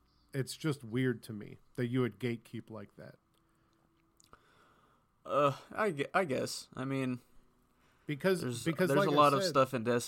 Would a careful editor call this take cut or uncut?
uncut